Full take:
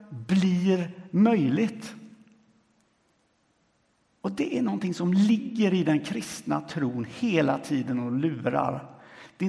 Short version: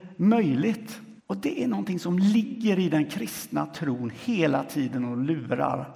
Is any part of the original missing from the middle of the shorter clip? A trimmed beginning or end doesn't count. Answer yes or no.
yes